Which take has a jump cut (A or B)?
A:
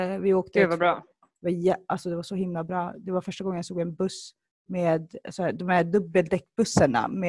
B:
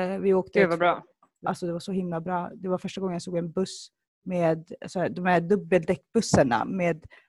B